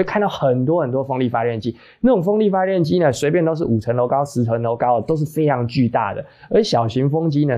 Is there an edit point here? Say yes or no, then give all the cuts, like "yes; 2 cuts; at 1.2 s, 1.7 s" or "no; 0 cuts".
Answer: no; 0 cuts